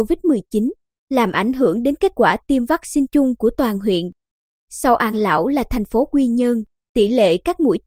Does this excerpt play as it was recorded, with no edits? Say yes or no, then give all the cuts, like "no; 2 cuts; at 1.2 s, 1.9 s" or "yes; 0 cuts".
yes; 0 cuts